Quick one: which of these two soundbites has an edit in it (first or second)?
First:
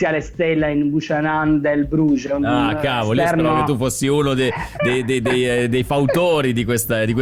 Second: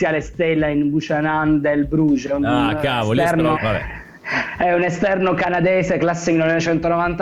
second